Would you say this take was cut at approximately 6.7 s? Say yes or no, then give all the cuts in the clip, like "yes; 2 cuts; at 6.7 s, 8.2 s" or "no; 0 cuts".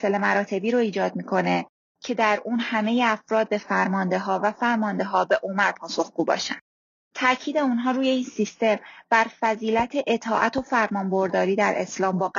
no; 0 cuts